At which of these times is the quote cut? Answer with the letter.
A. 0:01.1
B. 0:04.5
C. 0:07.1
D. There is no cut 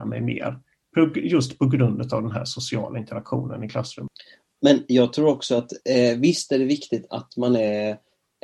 C